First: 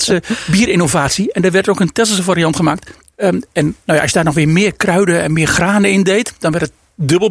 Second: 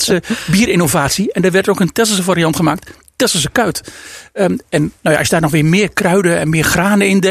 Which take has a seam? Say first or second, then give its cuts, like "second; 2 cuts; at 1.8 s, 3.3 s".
first; 1 cut; at 3.1 s